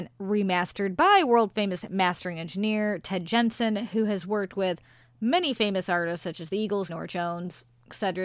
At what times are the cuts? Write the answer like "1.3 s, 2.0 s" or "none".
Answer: 6.9 s